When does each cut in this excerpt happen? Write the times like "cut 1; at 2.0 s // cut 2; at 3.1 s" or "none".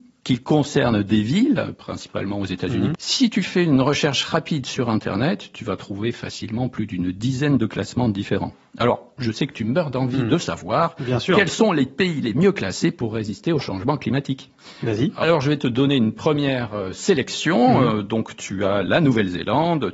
cut 1; at 2.9 s